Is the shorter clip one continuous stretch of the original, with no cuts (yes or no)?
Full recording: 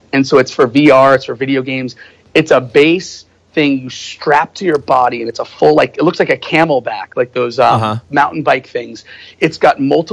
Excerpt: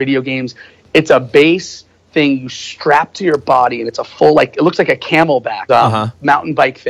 no